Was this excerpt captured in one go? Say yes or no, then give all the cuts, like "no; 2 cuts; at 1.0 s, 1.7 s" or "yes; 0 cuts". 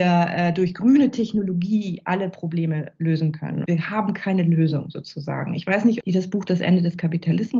no; 2 cuts; at 3.7 s, 6.0 s